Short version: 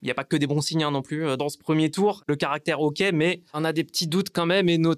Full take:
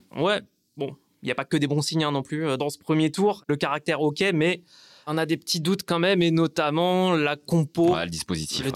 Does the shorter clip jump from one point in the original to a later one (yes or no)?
yes